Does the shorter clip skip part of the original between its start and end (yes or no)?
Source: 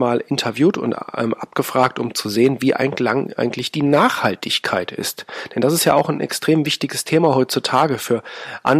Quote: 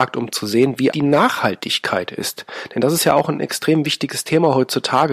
yes